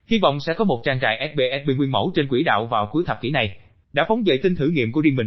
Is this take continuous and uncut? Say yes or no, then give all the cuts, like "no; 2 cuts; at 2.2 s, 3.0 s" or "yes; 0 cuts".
no; 1 cut; at 3.8 s